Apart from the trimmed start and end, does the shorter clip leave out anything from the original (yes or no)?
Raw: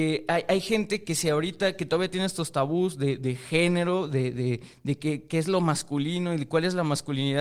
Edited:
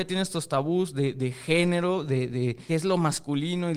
yes